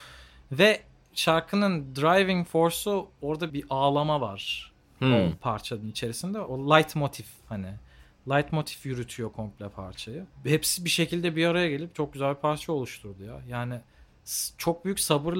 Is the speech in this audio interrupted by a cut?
yes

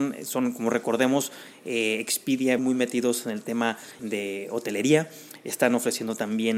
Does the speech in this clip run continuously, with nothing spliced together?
no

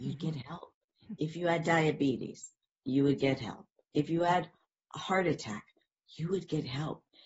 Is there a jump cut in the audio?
no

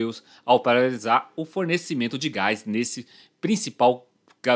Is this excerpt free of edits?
yes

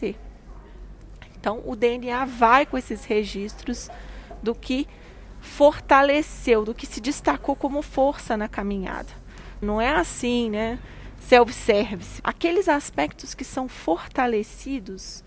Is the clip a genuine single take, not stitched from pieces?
no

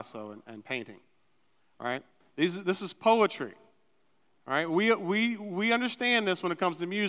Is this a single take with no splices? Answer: yes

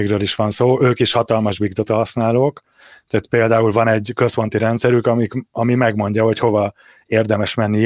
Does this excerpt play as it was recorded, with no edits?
yes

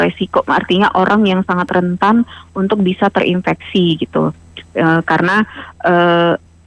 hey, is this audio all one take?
yes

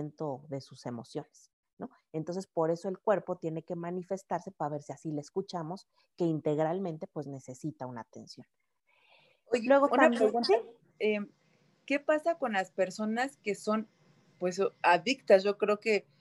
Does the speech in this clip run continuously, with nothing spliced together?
no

